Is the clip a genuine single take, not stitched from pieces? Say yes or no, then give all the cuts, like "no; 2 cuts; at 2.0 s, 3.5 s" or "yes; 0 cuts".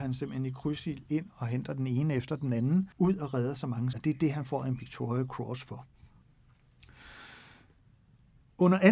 no; 2 cuts; at 2.9 s, 3.9 s